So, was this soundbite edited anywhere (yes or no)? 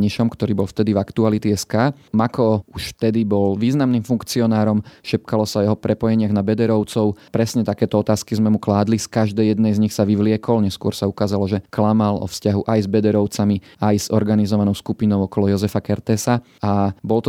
no